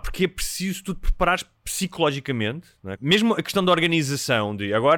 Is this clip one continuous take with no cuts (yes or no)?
no